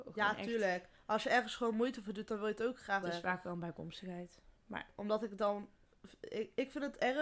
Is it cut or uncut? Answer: cut